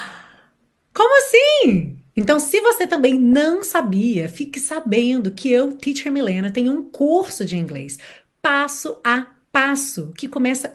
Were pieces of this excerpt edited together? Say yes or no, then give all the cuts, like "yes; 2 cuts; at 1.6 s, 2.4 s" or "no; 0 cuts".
no; 0 cuts